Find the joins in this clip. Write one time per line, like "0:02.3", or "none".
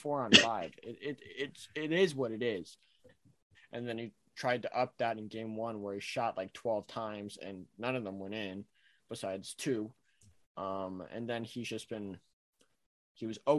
0:03.5